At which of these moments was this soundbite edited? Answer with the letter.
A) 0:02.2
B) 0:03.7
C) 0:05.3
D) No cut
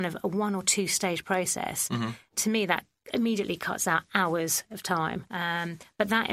C